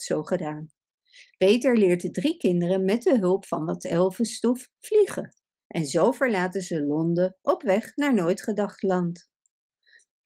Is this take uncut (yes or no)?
yes